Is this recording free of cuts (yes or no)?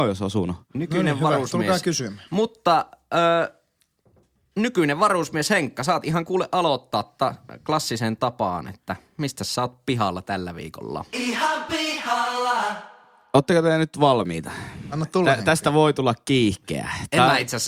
yes